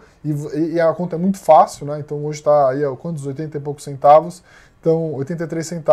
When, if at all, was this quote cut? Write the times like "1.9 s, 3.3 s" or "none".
none